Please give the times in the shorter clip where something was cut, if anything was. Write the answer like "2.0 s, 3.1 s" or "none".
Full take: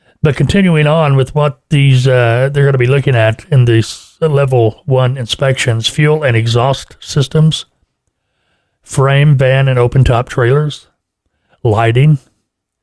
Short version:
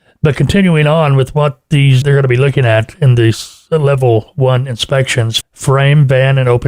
2.0 s, 5.4 s